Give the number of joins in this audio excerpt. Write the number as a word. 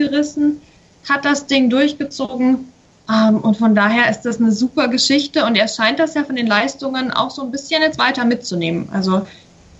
zero